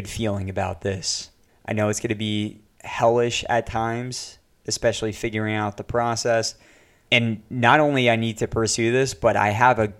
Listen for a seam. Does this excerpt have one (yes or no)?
yes